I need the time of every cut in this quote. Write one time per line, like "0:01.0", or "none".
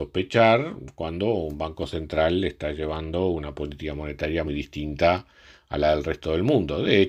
0:04.5